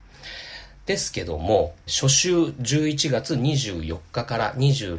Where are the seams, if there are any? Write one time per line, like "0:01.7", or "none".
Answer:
0:01.9